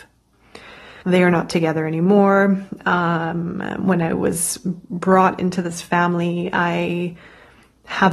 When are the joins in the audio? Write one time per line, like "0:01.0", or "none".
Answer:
0:01.0